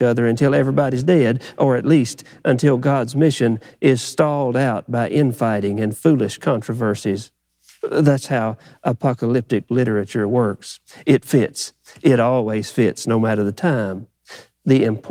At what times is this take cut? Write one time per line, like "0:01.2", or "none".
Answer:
none